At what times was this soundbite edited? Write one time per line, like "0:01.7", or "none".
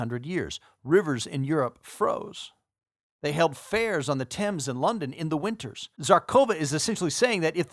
0:05.9